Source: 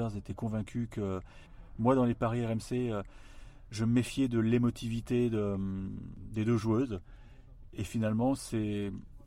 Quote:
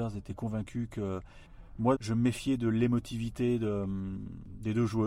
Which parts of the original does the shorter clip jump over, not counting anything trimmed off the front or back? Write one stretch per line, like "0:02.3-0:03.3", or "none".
0:01.9-0:03.7